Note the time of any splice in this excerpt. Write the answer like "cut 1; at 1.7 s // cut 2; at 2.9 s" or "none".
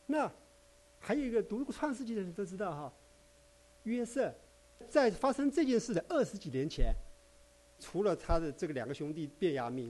cut 1; at 4.8 s // cut 2; at 7.8 s